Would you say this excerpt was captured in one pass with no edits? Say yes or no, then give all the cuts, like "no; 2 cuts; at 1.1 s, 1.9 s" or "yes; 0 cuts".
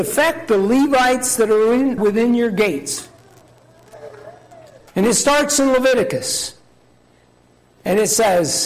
no; 2 cuts; at 2.0 s, 4.9 s